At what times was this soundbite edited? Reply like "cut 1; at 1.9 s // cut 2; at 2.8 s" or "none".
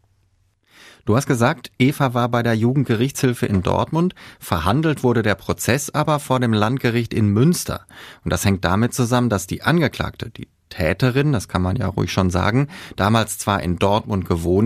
none